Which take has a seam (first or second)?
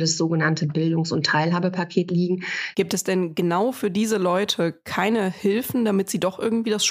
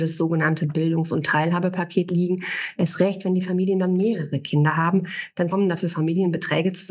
first